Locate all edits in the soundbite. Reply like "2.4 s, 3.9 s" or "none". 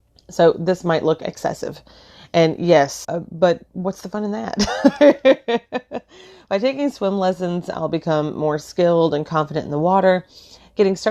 3.0 s

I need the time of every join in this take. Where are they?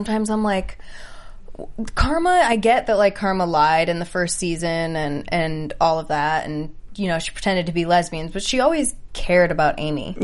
none

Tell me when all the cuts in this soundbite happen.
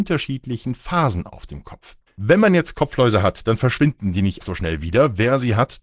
2.1 s, 4.4 s

